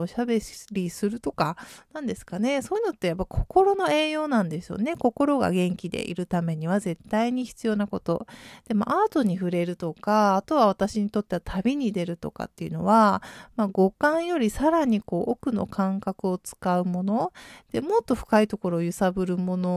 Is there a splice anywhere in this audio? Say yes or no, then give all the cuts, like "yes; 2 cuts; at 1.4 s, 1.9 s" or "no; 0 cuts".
no; 0 cuts